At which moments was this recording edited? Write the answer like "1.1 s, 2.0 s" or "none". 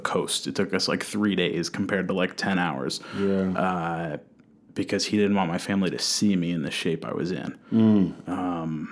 none